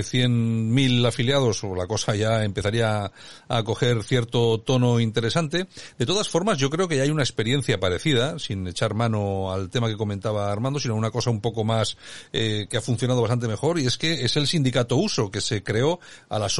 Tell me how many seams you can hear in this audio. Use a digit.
0